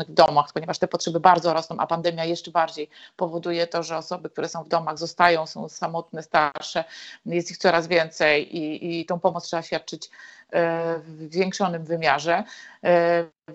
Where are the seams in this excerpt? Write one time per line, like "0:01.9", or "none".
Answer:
none